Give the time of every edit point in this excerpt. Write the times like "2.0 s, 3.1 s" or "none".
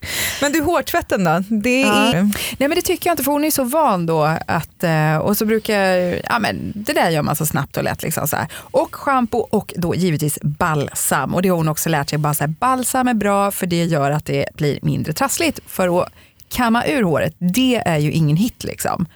2.1 s